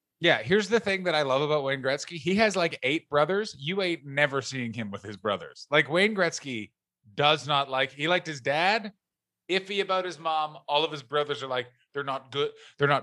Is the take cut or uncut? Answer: uncut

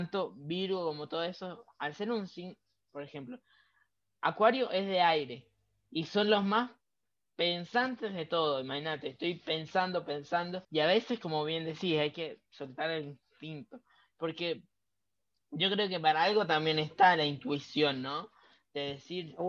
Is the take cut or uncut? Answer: cut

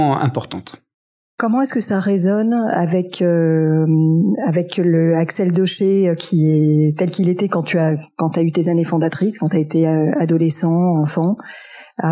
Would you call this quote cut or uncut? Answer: uncut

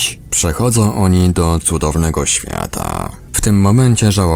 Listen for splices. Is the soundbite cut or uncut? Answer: cut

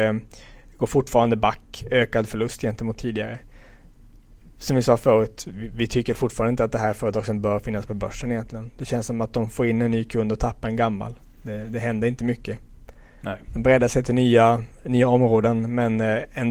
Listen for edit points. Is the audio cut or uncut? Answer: uncut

